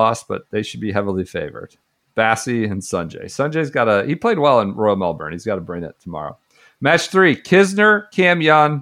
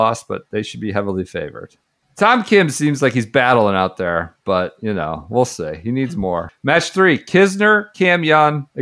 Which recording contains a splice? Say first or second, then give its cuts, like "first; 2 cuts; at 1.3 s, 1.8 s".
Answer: second; 2 cuts; at 2.0 s, 6.5 s